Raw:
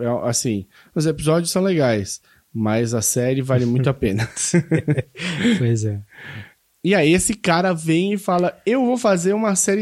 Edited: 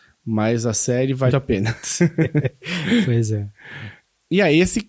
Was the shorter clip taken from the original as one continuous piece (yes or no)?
no